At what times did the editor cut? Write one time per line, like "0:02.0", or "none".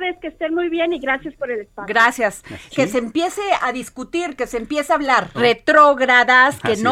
0:02.7
0:05.3